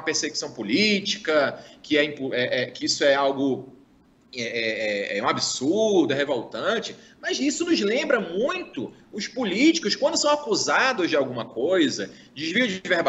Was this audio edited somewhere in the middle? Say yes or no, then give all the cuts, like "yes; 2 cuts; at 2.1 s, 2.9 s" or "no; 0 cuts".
no; 0 cuts